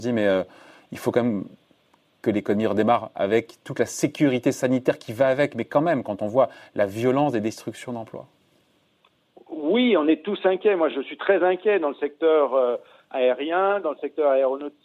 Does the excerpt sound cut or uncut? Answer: uncut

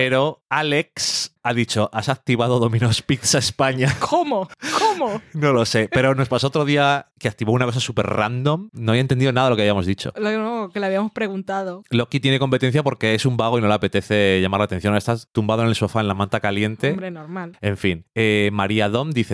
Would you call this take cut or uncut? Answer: uncut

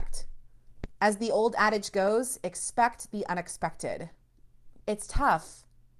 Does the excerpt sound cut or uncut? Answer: cut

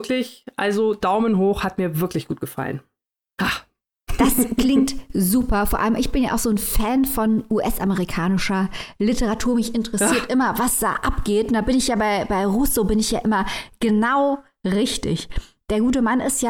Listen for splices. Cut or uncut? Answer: uncut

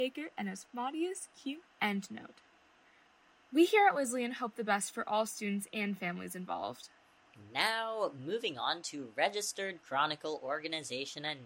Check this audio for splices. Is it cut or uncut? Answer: cut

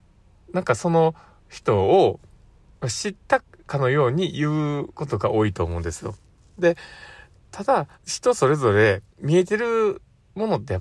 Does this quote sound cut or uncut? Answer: cut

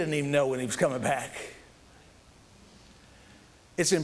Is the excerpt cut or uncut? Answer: uncut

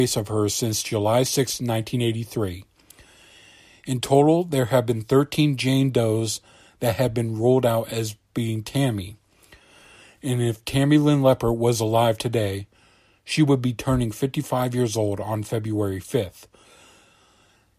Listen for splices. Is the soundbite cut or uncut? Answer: uncut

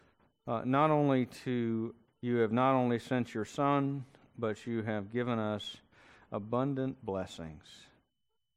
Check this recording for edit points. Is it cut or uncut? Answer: cut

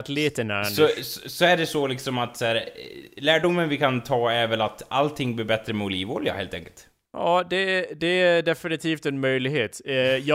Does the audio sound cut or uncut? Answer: uncut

